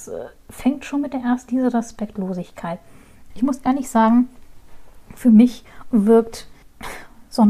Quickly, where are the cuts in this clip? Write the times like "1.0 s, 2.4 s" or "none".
1.5 s, 3.3 s